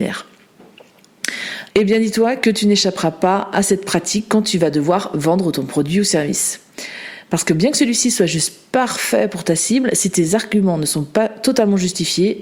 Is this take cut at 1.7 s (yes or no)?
yes